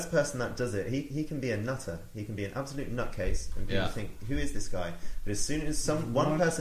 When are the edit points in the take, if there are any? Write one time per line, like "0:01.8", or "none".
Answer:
none